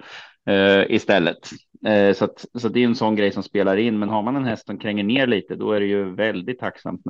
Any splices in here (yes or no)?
no